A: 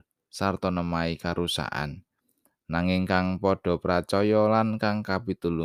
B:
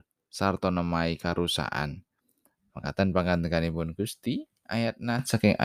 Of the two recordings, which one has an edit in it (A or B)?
B